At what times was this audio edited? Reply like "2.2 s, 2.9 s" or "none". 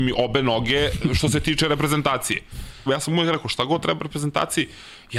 2.9 s

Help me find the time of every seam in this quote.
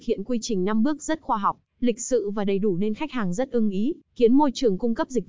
4.0 s

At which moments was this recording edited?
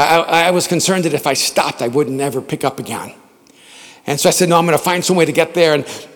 none

